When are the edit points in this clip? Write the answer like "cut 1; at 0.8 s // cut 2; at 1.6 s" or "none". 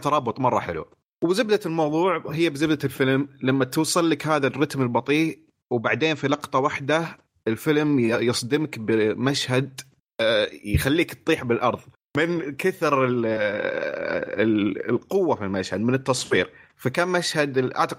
none

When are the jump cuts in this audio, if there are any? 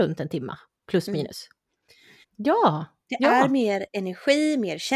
cut 1; at 2.2 s

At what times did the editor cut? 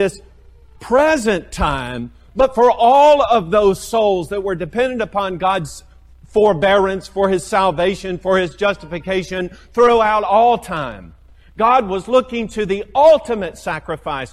none

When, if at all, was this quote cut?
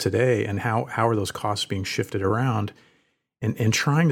none

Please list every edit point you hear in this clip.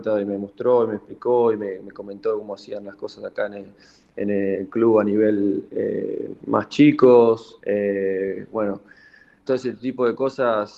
cut 1; at 9.5 s

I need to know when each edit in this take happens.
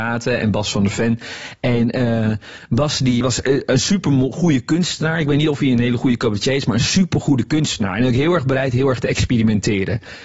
cut 1; at 3.2 s

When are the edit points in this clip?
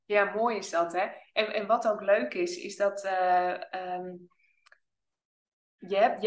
none

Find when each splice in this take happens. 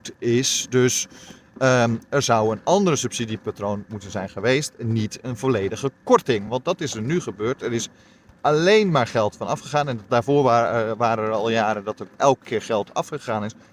none

